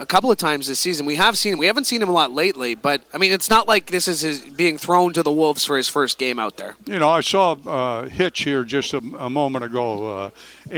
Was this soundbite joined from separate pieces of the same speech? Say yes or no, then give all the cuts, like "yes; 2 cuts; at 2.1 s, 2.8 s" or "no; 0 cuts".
no; 0 cuts